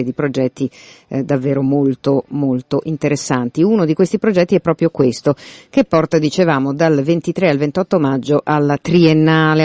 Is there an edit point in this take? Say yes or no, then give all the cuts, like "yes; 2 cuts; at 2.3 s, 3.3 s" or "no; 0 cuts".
no; 0 cuts